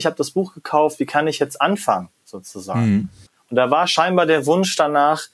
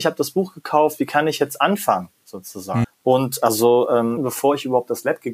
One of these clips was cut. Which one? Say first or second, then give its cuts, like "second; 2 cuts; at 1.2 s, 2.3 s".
second; 2 cuts; at 2.8 s, 4.2 s